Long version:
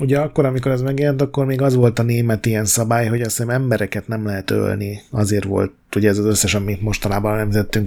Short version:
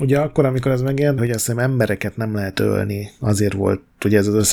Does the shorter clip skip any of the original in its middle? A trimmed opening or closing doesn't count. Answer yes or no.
yes